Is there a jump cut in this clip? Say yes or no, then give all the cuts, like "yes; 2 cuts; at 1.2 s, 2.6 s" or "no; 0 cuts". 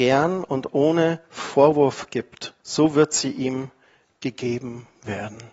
yes; 1 cut; at 2.6 s